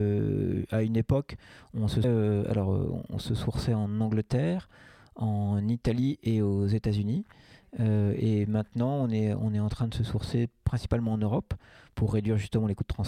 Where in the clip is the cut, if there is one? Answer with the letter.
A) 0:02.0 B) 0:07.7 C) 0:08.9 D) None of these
A